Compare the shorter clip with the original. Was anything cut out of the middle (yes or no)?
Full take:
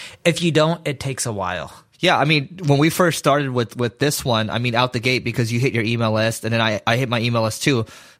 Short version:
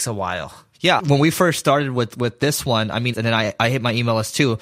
yes